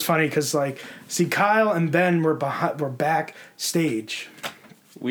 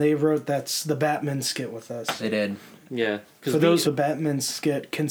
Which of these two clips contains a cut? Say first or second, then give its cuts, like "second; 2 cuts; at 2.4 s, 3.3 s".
second; 1 cut; at 3.8 s